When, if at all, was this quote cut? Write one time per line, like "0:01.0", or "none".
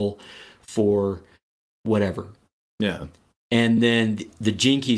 none